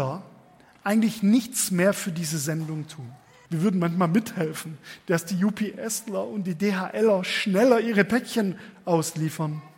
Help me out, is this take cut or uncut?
cut